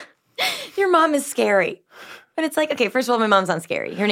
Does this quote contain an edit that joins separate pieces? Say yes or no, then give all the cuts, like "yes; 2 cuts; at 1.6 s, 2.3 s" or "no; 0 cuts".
no; 0 cuts